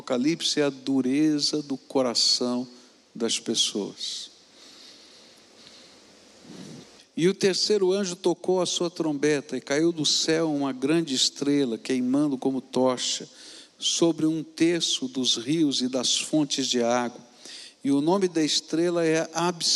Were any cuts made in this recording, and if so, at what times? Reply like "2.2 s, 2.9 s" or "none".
7.0 s